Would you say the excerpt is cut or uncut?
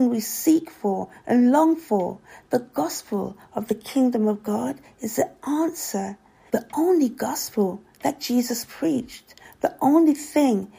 cut